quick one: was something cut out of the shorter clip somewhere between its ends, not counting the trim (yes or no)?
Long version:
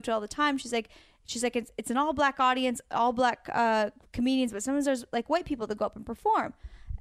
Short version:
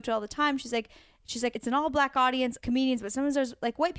yes